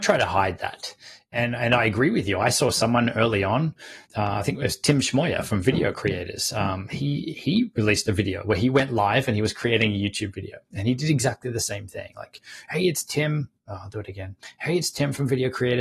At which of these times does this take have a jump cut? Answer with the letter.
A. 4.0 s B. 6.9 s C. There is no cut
A